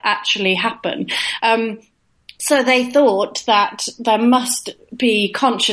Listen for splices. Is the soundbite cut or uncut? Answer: cut